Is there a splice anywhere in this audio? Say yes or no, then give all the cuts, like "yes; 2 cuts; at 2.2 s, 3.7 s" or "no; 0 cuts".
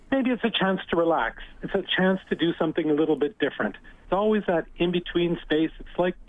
yes; 1 cut; at 4.0 s